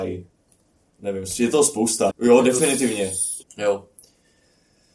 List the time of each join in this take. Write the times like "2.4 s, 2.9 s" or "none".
2.1 s, 3.4 s